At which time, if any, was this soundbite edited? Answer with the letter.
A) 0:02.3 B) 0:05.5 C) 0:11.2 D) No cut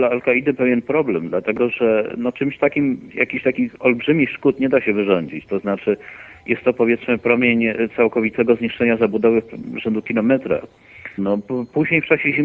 C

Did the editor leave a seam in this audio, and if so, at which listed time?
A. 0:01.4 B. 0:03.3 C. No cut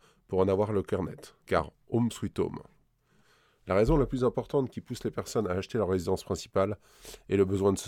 A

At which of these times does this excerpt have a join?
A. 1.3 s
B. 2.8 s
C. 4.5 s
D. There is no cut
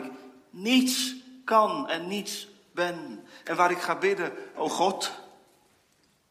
C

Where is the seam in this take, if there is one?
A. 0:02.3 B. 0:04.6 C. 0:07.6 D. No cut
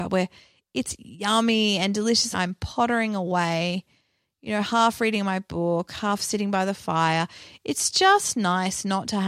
A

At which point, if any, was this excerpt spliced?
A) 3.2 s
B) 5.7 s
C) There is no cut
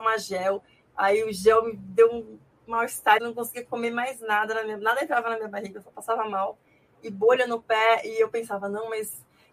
A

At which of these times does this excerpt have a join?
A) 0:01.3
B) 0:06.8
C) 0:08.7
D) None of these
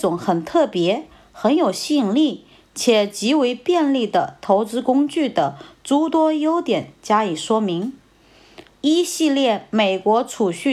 C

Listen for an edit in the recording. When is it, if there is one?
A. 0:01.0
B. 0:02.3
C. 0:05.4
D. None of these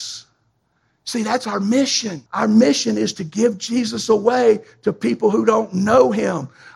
B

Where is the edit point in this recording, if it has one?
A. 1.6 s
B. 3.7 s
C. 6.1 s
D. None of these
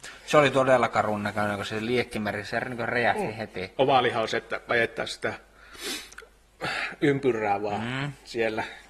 B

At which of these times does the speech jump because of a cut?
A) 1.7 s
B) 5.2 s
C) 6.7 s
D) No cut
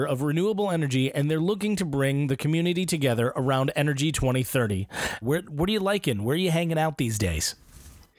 B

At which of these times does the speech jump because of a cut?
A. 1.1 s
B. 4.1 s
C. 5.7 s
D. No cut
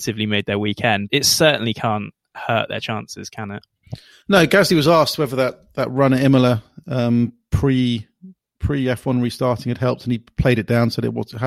A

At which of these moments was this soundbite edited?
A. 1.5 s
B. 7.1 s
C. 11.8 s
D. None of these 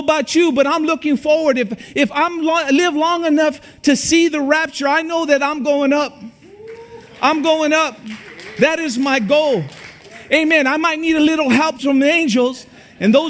C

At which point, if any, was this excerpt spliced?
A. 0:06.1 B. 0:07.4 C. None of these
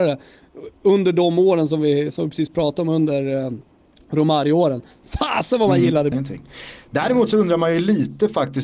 A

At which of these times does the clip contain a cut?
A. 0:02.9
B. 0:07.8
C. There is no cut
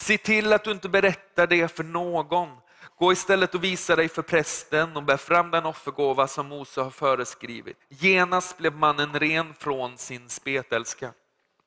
B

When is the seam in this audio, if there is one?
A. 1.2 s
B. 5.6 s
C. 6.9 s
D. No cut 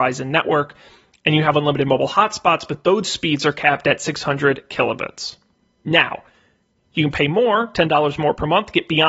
D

